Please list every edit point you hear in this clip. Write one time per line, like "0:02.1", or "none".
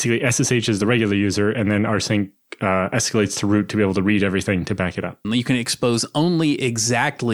0:05.2